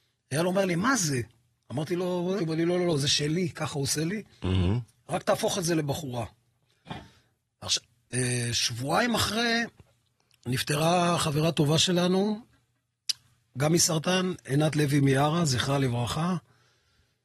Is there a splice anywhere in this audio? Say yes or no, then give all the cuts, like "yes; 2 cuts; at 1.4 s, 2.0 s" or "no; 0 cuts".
yes; 1 cut; at 2.4 s